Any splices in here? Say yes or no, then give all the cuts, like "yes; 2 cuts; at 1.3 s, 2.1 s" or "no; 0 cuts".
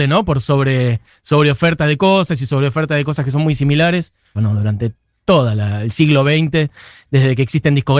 yes; 1 cut; at 4.4 s